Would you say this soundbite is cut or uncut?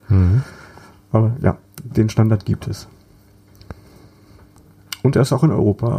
uncut